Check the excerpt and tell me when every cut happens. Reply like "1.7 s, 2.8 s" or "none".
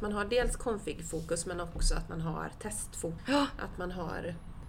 3.2 s